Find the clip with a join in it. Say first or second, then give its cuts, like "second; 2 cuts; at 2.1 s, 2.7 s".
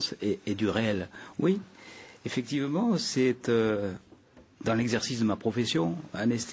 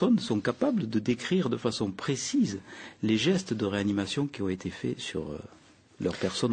first; 1 cut; at 1.3 s